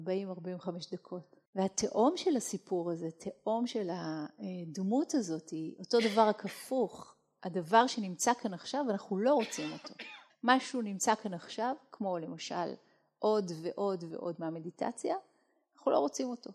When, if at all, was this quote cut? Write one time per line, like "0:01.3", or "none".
0:01.4
0:10.3
0:14.1